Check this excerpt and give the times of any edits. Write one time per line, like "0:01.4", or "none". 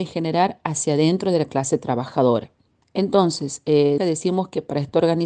0:02.8
0:04.0